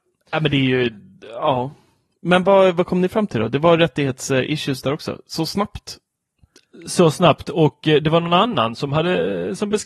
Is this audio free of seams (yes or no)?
yes